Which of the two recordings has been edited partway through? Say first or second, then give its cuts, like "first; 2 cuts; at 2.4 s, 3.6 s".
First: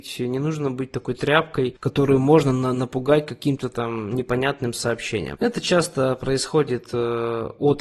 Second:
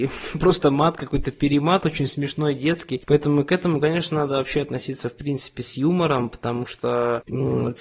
first; 1 cut; at 5.3 s